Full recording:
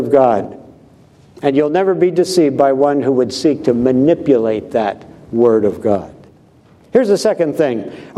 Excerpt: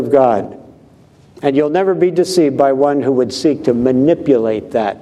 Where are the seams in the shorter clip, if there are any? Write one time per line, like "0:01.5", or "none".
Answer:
none